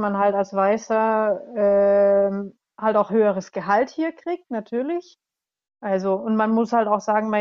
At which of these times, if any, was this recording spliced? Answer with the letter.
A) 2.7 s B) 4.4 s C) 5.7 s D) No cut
C